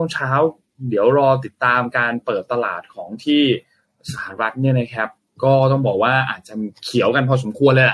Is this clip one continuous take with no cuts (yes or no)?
yes